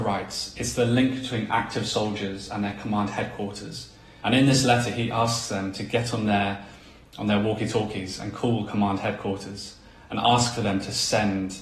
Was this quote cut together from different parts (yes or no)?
yes